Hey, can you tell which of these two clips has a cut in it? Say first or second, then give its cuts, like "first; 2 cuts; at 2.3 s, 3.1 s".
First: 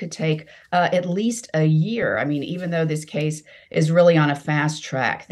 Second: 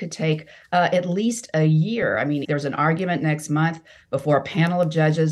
second; 1 cut; at 2.4 s